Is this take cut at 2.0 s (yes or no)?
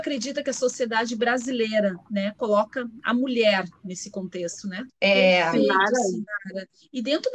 no